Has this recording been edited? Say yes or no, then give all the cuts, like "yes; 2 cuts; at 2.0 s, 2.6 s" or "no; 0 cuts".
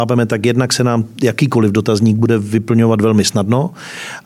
no; 0 cuts